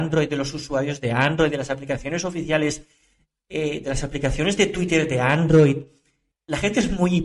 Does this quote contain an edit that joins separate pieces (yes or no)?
yes